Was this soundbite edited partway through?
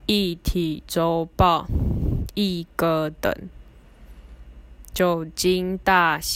no; 0 cuts

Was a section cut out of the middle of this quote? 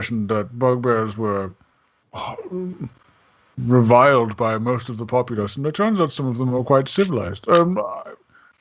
no; 0 cuts

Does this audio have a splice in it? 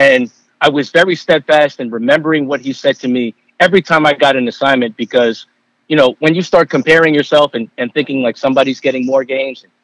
no; 0 cuts

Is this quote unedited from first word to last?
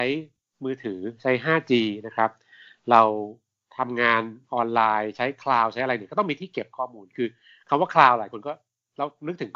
yes; 0 cuts

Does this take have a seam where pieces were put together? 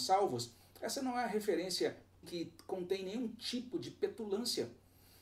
yes; 1 cut; at 2.2 s

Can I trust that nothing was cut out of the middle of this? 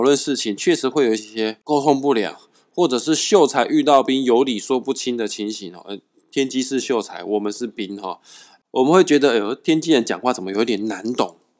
no; 1 cut; at 1.2 s

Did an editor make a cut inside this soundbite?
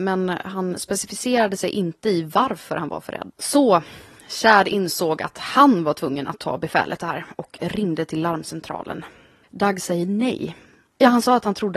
yes; 2 cuts; at 3.3 s, 9.4 s

